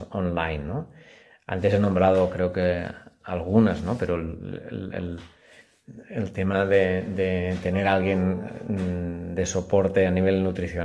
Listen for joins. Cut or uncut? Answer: uncut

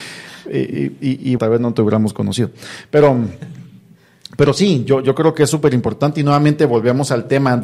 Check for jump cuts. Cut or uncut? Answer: cut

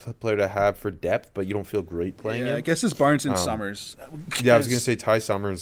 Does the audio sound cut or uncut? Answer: cut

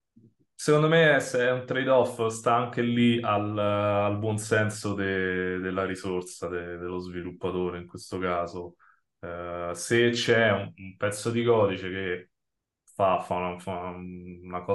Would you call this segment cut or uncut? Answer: uncut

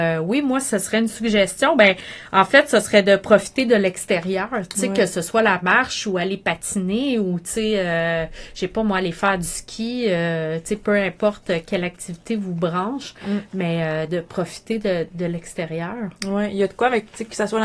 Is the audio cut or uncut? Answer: uncut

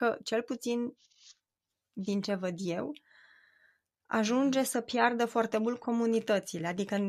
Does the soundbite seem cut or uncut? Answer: uncut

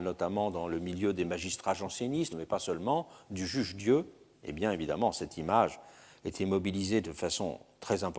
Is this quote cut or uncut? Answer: uncut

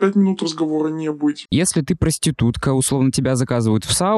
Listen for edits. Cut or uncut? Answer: cut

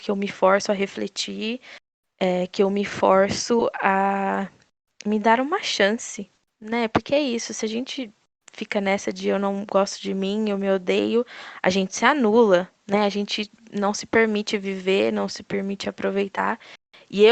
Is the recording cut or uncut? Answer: uncut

